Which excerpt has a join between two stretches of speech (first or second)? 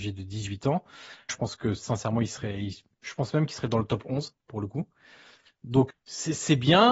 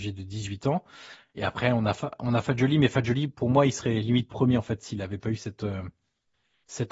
first